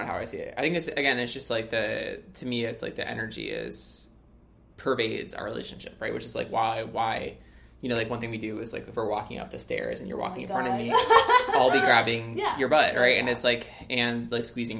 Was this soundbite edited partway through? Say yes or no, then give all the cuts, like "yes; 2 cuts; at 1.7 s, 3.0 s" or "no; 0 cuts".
no; 0 cuts